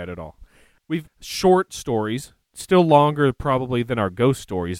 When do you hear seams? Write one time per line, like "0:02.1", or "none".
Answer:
0:01.1